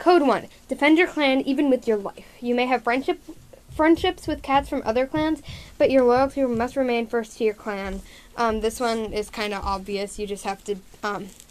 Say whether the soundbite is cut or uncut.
uncut